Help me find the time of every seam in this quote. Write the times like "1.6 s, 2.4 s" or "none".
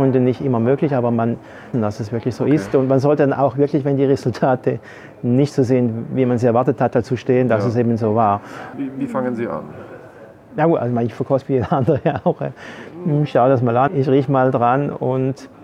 1.7 s, 8.7 s, 13.9 s